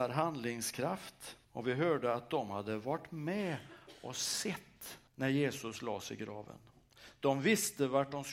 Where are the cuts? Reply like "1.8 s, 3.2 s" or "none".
1.4 s, 5.1 s